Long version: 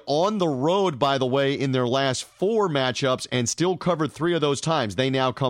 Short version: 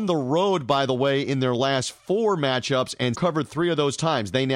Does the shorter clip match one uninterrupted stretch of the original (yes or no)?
no